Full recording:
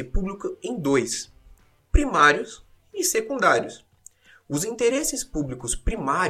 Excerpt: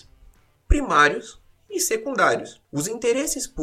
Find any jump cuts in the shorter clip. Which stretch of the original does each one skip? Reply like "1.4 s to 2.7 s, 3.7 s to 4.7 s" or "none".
3.9 s to 4.4 s